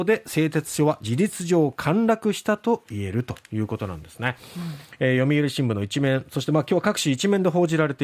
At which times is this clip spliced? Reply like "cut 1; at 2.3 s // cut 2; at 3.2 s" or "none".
cut 1; at 3.4 s